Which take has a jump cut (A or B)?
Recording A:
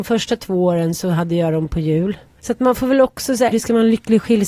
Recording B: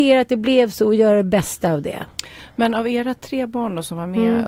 A